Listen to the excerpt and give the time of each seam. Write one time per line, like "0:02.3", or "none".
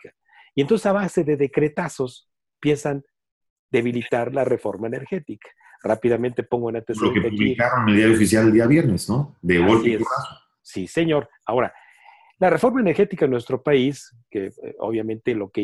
none